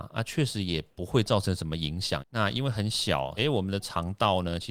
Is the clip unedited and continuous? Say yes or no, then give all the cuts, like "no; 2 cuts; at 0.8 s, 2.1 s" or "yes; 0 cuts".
no; 2 cuts; at 2.2 s, 3.4 s